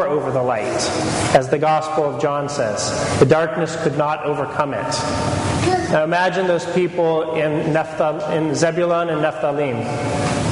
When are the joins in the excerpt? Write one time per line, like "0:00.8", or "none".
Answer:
0:05.9